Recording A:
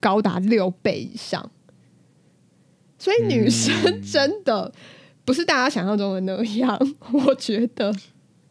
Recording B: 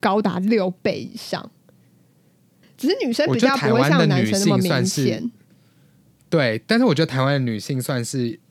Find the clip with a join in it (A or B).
B